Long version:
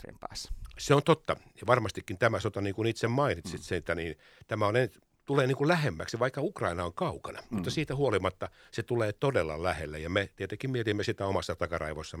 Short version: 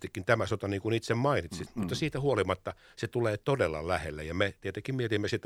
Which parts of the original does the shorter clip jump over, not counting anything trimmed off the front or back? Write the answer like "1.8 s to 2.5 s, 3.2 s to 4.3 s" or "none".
3.6 s to 7.4 s